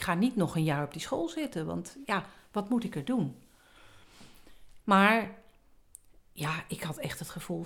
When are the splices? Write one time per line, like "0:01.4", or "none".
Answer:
0:04.8